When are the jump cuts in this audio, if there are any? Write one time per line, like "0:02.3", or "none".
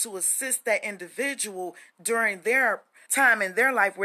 0:03.1

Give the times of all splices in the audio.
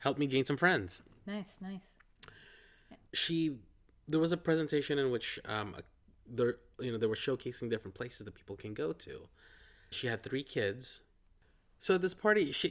0:03.1
0:09.9

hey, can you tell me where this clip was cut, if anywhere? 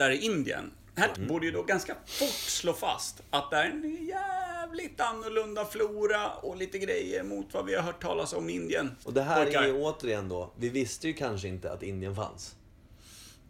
0:01.1

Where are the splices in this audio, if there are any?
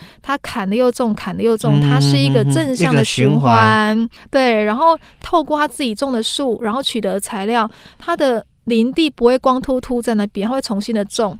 none

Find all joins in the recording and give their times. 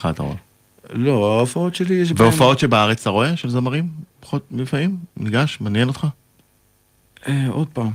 none

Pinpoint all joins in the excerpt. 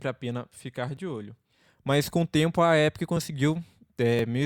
none

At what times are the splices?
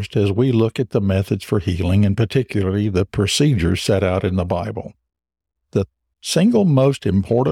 none

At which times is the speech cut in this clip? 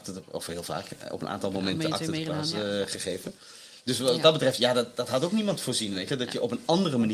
none

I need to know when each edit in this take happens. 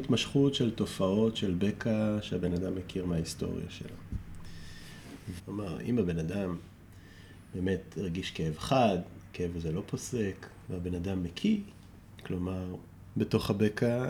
0:05.4
0:10.7
0:13.1

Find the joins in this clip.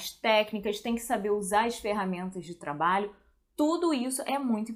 none

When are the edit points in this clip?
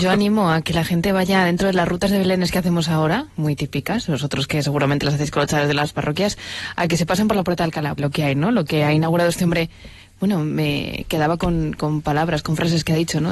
0:08.0

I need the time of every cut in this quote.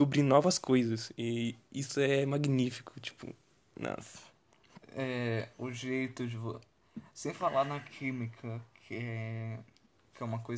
none

